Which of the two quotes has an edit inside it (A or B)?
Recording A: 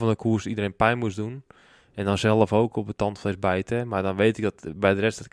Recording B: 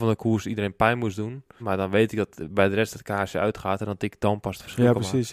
B